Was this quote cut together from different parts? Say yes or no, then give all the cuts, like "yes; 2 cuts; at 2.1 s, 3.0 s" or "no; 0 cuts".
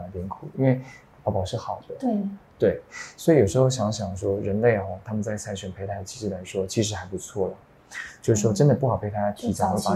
no; 0 cuts